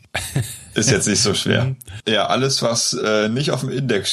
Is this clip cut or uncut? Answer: cut